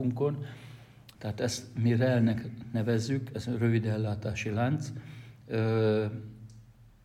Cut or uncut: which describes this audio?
cut